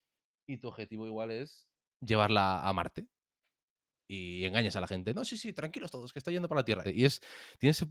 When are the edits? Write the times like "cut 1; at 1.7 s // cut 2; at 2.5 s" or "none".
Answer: cut 1; at 6.8 s